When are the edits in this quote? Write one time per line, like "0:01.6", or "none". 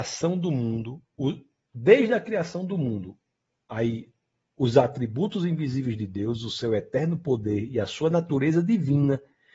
none

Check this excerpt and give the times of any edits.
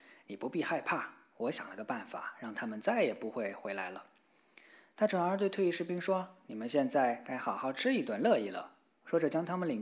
none

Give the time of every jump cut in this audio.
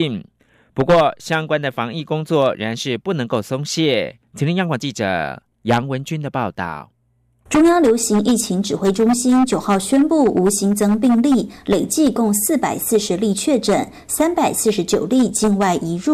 none

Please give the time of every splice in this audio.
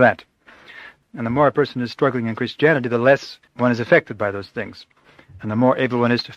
0:01.0
0:03.5

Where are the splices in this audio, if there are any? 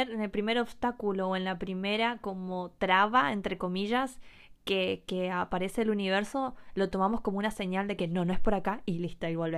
none

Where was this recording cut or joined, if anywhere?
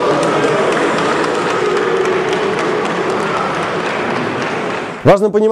none

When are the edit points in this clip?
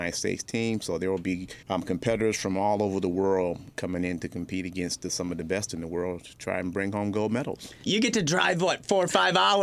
0:01.6
0:07.9

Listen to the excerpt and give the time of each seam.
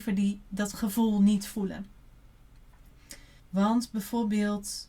0:03.4

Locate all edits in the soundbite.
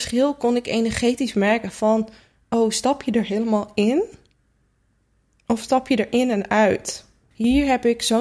0:07.3

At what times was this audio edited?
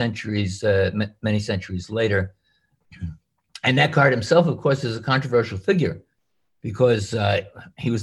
none

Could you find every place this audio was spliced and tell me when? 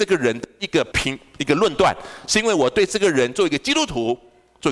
0:00.9

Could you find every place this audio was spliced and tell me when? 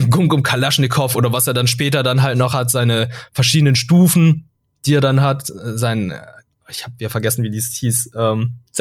none

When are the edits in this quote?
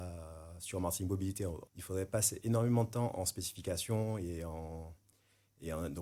0:01.7

